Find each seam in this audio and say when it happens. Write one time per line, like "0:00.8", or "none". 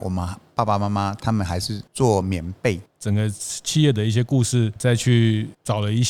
0:02.9
0:04.8